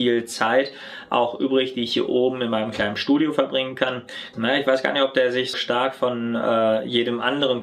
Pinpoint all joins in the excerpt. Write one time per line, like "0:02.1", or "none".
0:04.3
0:05.5